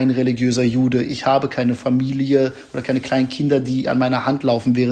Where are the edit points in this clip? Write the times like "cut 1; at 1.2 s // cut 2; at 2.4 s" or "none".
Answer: none